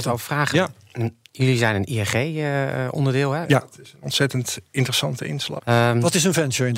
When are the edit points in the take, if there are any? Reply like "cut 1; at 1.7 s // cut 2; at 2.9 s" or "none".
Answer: cut 1; at 3.4 s // cut 2; at 5.6 s